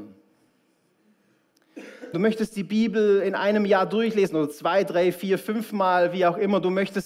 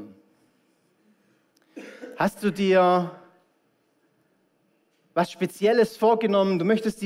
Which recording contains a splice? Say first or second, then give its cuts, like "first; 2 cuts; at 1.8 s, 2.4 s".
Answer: first; 1 cut; at 2.1 s